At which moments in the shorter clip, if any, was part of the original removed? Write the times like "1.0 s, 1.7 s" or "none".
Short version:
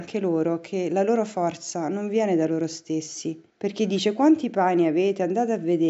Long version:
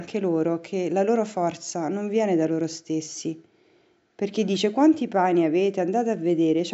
3.5 s